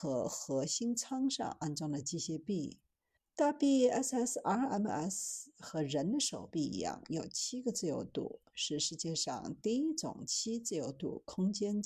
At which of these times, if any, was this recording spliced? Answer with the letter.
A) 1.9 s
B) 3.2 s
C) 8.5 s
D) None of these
B